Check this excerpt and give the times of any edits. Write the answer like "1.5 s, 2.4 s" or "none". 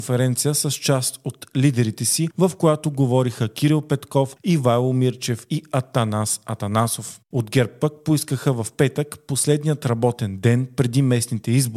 7.3 s